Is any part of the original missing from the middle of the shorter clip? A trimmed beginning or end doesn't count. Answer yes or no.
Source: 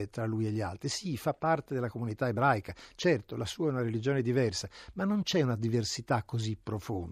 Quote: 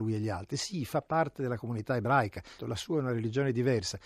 yes